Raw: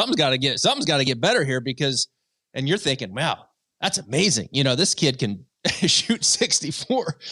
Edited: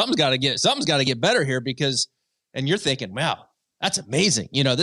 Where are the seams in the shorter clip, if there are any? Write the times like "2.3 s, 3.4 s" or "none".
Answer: none